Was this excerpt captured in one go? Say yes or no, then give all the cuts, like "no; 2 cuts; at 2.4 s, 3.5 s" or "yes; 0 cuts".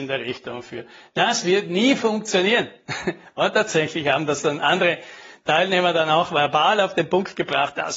yes; 0 cuts